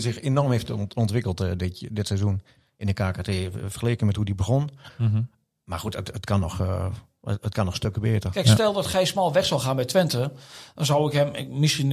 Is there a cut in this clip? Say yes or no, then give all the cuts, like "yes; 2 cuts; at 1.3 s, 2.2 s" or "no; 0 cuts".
no; 0 cuts